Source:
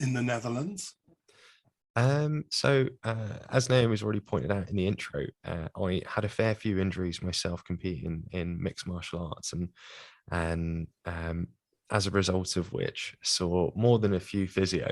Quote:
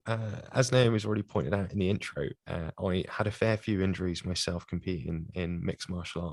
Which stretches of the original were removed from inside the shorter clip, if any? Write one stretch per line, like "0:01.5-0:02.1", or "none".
none